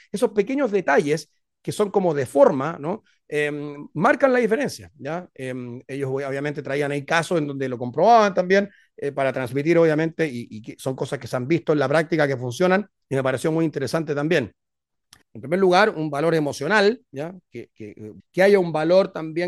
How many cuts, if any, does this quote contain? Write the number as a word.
two